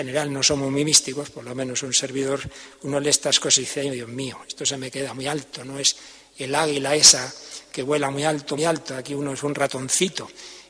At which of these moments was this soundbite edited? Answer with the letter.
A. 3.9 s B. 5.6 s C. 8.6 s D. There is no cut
C